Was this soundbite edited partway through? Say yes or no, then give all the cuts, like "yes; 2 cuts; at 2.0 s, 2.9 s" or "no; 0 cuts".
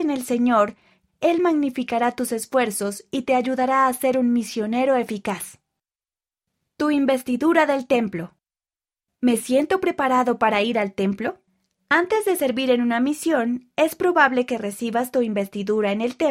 yes; 1 cut; at 1.1 s